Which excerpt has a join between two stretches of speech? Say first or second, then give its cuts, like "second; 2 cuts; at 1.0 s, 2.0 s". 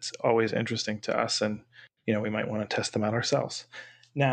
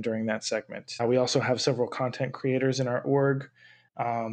second; 1 cut; at 1.0 s